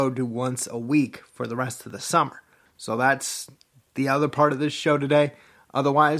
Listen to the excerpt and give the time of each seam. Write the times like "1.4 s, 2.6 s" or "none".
2.7 s